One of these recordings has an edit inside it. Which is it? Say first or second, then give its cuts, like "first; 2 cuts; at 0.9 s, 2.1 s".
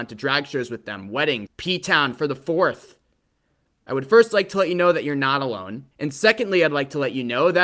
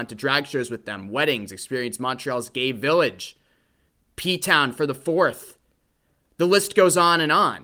first; 3 cuts; at 1.5 s, 3.7 s, 5.9 s